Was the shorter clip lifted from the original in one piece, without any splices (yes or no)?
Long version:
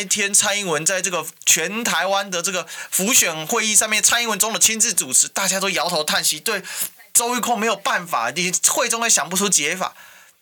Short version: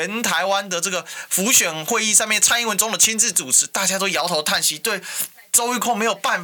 yes